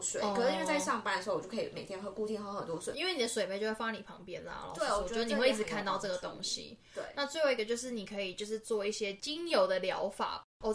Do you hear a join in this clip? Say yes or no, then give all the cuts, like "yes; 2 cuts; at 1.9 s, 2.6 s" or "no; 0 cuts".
no; 0 cuts